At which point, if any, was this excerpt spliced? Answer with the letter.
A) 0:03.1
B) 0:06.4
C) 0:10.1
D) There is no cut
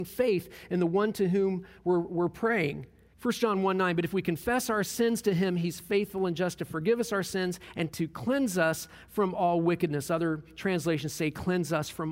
A